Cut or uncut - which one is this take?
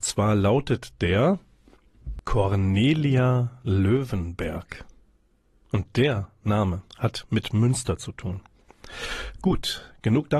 uncut